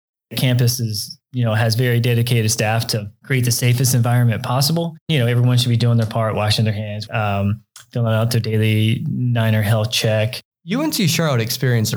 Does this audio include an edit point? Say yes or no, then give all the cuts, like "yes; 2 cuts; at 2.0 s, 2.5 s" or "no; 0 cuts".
yes; 2 cuts; at 7.1 s, 10.5 s